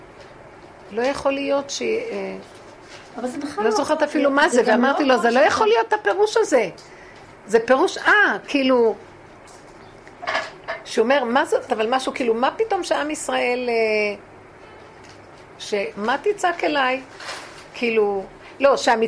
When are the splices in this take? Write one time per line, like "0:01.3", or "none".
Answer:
0:11.7
0:15.9